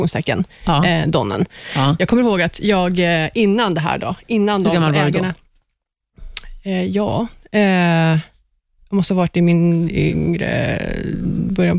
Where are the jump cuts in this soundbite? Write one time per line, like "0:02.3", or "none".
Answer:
none